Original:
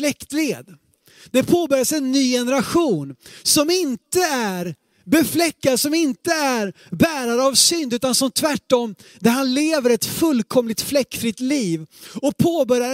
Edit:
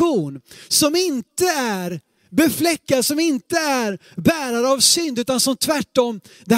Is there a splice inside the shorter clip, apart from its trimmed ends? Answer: no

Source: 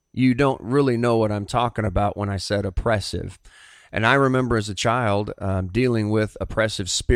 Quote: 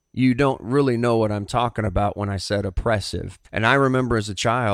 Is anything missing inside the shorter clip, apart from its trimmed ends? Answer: yes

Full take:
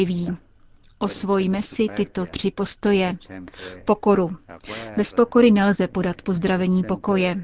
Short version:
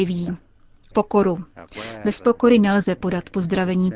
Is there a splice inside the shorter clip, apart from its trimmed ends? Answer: yes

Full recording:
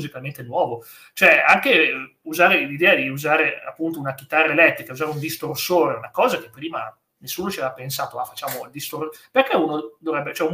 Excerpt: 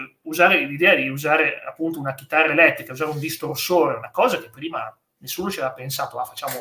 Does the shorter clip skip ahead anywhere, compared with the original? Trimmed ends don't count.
no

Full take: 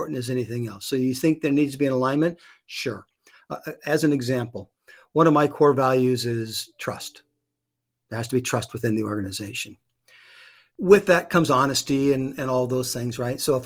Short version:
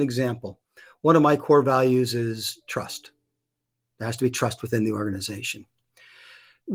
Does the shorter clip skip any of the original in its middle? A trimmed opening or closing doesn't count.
no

